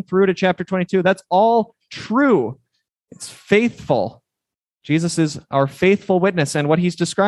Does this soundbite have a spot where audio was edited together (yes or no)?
no